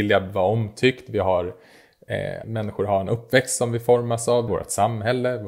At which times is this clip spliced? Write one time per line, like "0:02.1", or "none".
0:02.4
0:04.5